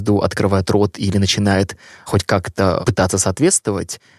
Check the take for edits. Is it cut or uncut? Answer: uncut